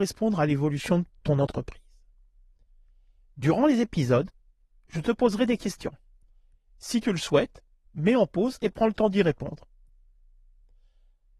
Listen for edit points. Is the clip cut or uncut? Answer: uncut